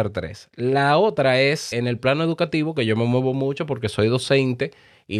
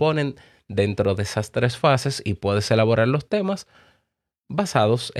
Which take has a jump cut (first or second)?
first